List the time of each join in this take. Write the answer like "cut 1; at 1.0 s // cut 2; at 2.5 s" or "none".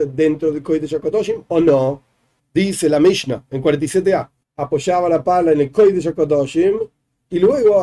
cut 1; at 2.4 s // cut 2; at 4.4 s